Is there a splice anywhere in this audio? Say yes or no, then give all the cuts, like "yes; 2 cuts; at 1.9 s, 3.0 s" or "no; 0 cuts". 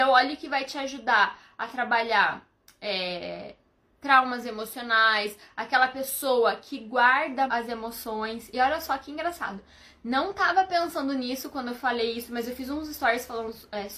yes; 1 cut; at 7.5 s